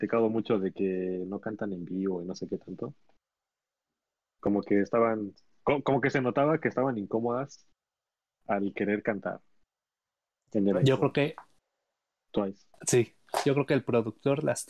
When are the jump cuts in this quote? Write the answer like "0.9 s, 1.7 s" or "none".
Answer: none